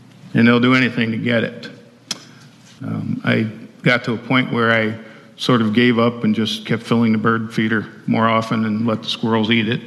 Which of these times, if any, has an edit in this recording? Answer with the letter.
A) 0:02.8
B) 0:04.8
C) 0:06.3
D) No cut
A